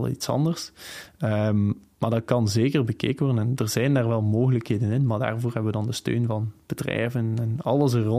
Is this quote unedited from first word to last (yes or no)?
yes